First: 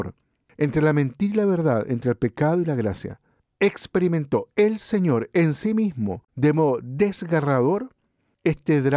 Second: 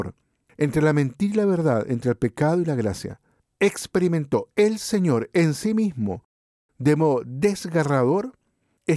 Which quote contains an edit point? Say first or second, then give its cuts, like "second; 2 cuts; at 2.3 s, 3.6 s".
first; 1 cut; at 6.3 s